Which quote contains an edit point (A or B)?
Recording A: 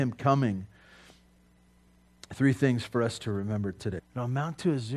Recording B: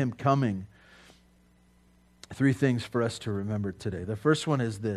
A